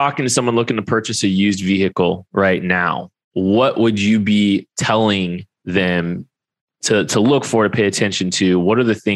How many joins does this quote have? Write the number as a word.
zero